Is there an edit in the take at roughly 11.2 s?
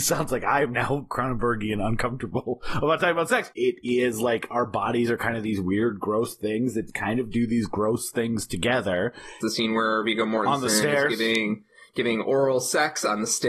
no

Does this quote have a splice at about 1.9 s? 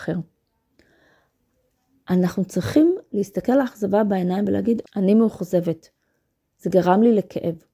no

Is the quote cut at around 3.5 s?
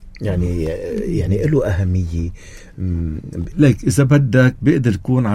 yes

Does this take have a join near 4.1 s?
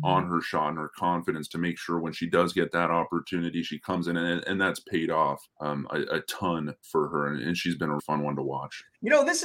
no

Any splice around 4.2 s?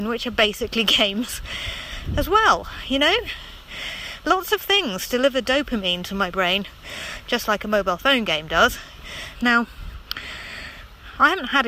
no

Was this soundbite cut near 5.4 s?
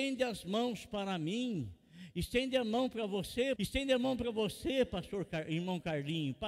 no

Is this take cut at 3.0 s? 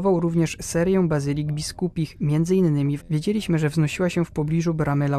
yes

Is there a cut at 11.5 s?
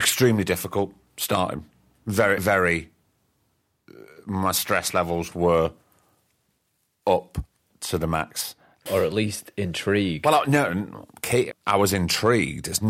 yes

